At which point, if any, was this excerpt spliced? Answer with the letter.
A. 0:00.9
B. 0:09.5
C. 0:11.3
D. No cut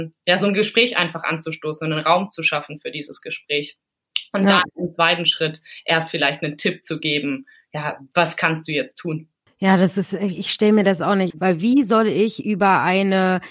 C